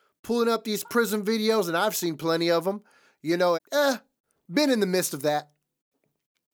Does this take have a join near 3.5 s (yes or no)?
yes